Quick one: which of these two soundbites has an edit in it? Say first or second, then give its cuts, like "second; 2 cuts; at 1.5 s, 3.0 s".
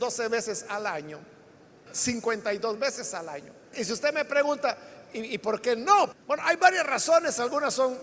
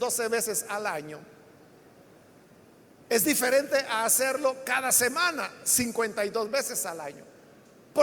first; 3 cuts; at 1.9 s, 3.7 s, 6.1 s